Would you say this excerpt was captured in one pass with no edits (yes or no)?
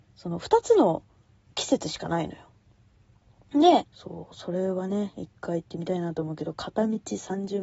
no